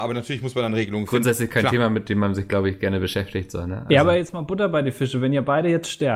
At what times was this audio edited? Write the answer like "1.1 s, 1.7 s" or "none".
none

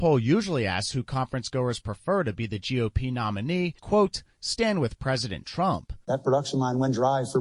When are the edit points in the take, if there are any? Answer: 3.8 s, 6.0 s

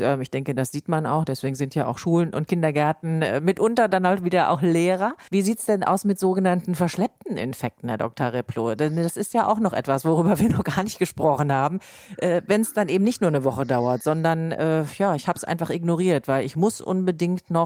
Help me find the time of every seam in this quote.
5.3 s

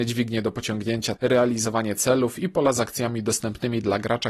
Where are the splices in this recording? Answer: 1.2 s

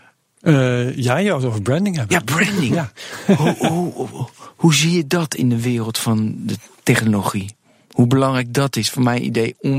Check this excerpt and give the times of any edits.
none

